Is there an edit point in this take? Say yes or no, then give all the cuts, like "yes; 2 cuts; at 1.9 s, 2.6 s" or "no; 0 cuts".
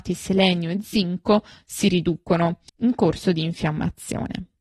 yes; 1 cut; at 2.7 s